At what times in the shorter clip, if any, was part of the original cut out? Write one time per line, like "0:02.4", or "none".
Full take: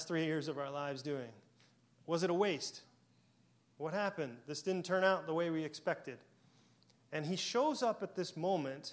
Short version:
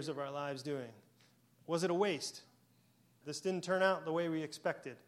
0:03.2